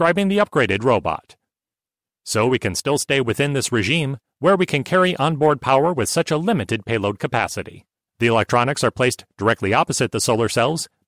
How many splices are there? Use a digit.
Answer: 1